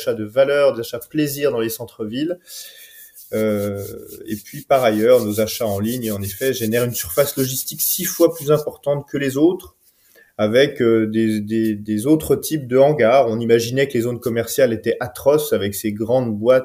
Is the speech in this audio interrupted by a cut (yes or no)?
no